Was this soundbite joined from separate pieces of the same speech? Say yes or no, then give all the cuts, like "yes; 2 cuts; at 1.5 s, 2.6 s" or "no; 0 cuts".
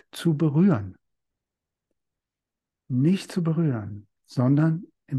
yes; 1 cut; at 4.2 s